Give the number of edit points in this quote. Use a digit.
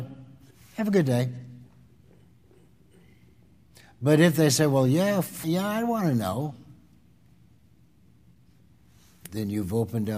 1